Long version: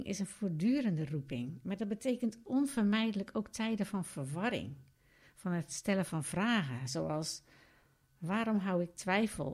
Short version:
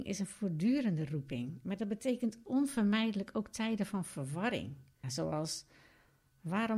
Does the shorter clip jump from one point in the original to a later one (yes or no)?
yes